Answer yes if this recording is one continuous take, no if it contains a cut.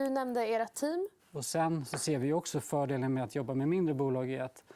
no